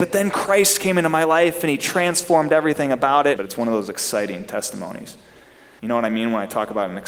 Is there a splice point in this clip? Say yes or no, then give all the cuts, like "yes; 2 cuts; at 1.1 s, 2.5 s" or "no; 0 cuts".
yes; 2 cuts; at 3.4 s, 5.8 s